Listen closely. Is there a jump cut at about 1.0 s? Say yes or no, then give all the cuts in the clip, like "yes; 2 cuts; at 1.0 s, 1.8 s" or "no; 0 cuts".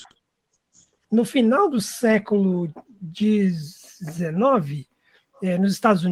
yes; 1 cut; at 1.0 s